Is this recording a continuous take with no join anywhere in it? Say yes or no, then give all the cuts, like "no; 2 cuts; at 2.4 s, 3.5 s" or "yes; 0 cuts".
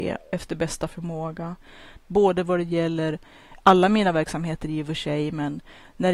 no; 1 cut; at 2.0 s